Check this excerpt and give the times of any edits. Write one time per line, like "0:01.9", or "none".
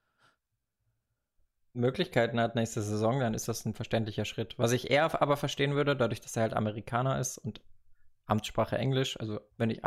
none